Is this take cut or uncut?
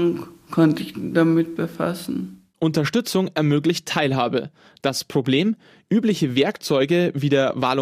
uncut